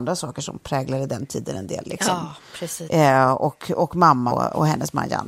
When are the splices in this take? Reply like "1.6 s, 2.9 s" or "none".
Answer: 1.8 s, 2.9 s, 4.3 s